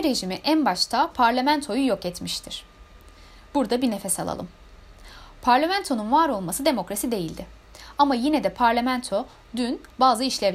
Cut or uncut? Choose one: uncut